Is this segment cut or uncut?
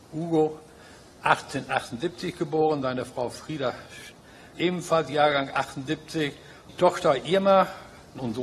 cut